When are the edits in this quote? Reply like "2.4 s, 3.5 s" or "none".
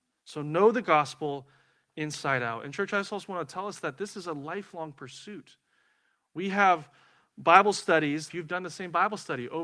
8.3 s